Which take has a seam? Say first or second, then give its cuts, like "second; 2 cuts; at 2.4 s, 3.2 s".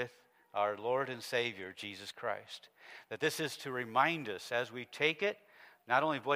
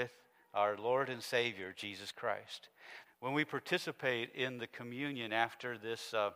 second; 1 cut; at 3.0 s